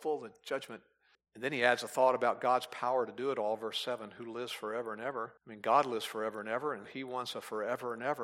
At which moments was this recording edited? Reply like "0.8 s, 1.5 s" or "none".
1.1 s, 5.4 s, 6.8 s